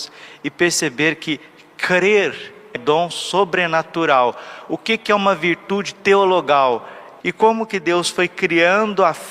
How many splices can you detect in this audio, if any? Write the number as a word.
two